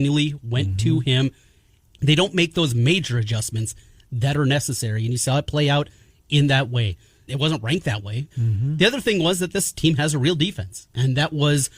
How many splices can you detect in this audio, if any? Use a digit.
3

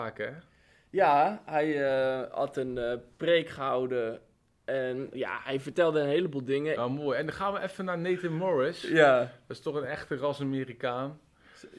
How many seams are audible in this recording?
2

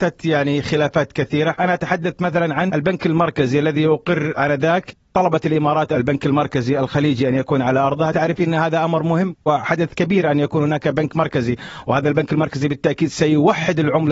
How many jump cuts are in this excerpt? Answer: 0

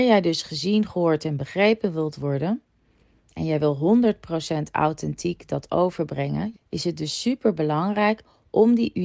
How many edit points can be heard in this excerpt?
1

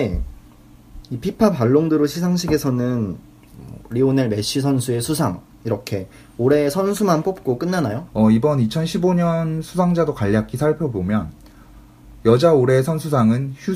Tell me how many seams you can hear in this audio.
1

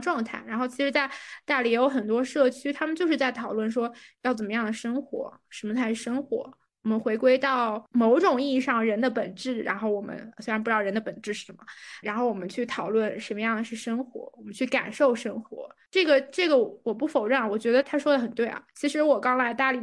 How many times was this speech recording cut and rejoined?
2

